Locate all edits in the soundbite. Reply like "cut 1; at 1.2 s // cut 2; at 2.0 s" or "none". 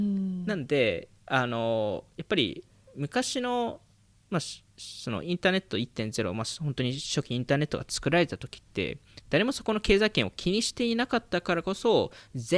none